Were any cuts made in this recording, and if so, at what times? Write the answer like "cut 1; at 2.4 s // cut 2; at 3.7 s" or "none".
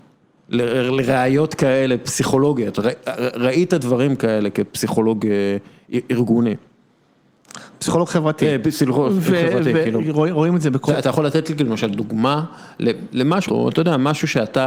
cut 1; at 10.9 s // cut 2; at 13.5 s